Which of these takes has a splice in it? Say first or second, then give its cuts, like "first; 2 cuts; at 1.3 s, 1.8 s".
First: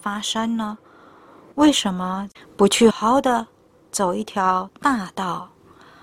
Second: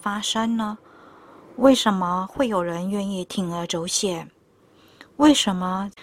first; 2 cuts; at 1.5 s, 2.9 s